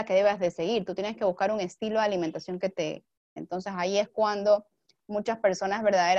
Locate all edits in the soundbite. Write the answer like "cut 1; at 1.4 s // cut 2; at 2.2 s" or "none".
cut 1; at 3.4 s